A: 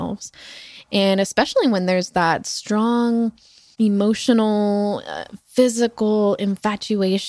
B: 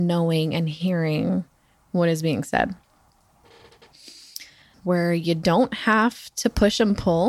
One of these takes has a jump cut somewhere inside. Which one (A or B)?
B